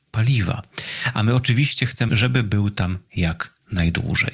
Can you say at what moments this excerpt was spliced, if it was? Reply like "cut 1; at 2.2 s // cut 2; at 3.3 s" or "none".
cut 1; at 2.1 s